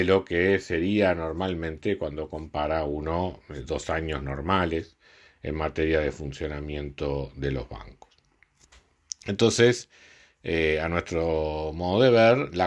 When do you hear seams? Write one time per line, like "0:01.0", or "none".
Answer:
none

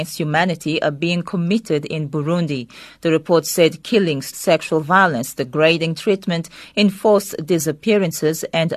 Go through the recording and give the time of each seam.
0:04.3

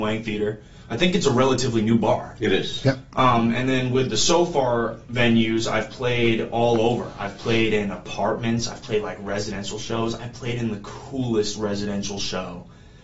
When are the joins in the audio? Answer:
none

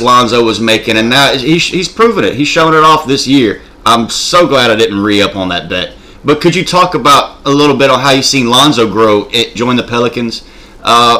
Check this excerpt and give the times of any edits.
0:09.6

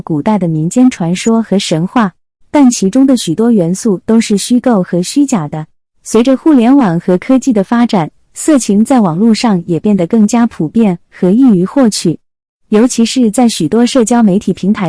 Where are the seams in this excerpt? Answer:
0:02.4
0:05.8

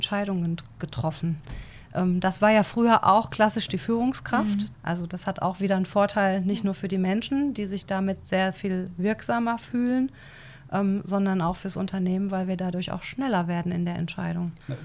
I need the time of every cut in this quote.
0:04.7

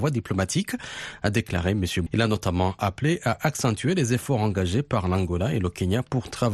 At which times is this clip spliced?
0:02.1

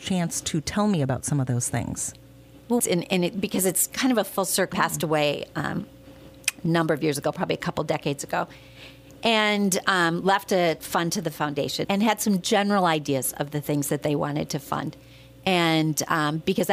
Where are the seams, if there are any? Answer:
0:02.8
0:04.7
0:11.8

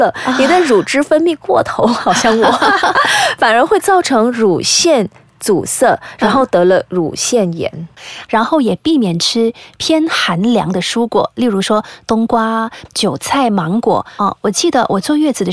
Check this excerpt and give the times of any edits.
0:08.3
0:12.9
0:14.2

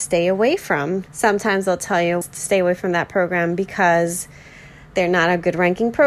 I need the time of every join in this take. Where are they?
0:01.1
0:02.2

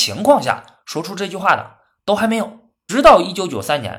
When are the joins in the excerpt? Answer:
0:02.9

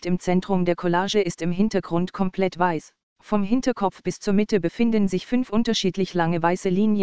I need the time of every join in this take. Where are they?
0:03.1

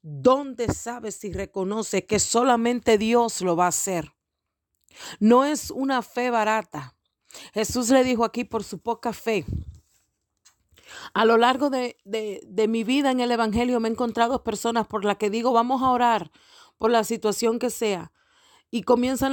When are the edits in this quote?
none

